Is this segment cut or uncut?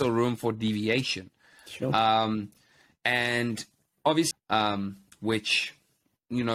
cut